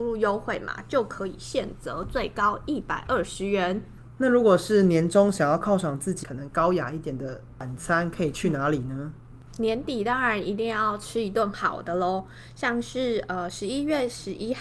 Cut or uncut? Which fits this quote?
cut